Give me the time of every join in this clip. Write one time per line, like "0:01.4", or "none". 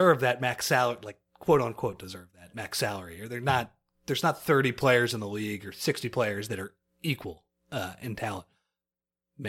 none